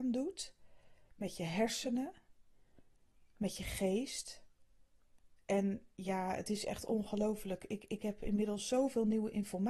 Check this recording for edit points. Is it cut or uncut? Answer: uncut